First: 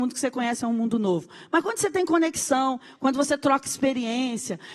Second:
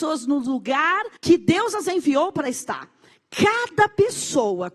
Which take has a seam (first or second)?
second